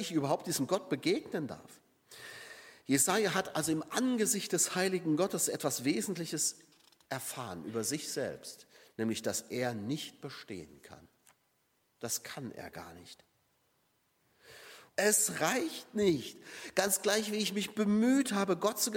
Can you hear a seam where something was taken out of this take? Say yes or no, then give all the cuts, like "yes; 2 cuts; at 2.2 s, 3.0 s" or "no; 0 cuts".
yes; 1 cut; at 14.9 s